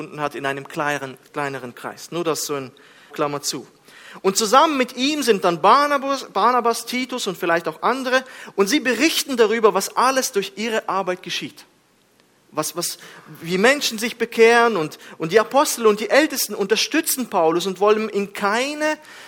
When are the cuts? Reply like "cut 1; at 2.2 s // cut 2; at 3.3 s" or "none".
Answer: cut 1; at 3.1 s